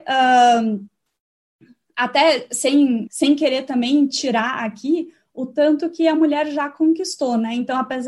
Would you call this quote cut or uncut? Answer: cut